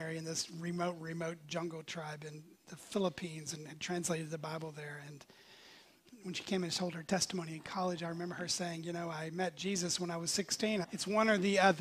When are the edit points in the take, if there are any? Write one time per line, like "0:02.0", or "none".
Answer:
0:10.8